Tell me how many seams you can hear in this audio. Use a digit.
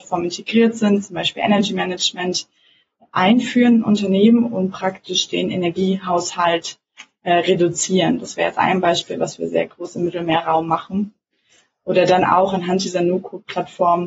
0